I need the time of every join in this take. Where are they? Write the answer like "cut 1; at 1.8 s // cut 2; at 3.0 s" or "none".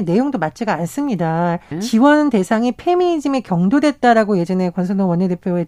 cut 1; at 1.7 s